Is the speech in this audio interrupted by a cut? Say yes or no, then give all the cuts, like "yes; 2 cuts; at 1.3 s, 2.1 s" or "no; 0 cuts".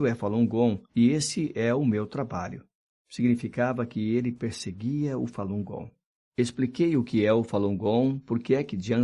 no; 0 cuts